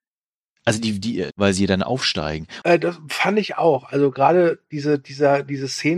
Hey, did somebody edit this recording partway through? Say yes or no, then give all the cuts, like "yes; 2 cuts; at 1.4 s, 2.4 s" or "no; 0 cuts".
yes; 2 cuts; at 1.3 s, 2.6 s